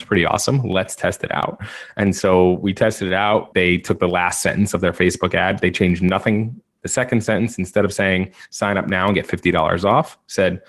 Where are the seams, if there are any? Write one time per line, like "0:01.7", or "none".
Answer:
0:03.5
0:06.8